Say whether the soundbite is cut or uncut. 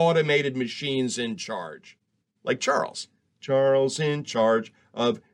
uncut